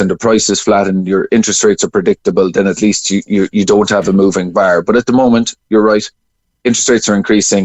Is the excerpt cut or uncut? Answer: uncut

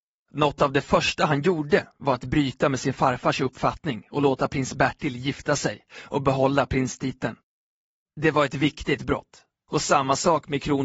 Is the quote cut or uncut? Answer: uncut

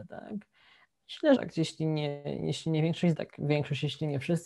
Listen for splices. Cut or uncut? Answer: cut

